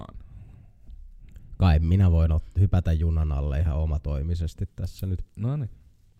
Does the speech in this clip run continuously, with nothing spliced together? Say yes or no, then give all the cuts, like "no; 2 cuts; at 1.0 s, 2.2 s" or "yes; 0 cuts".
yes; 0 cuts